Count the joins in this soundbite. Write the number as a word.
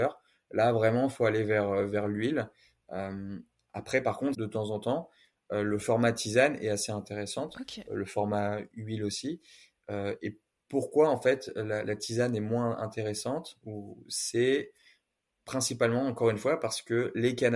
one